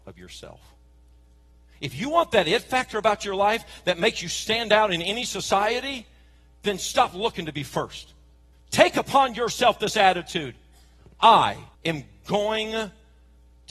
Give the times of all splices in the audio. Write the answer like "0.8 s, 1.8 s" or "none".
8.5 s, 11.7 s